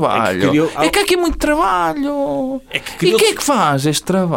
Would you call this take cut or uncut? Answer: uncut